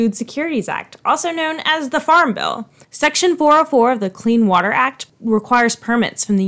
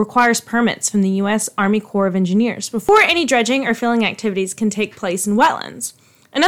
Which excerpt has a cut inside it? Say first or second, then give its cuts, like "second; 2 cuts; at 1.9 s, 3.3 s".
first; 1 cut; at 2.8 s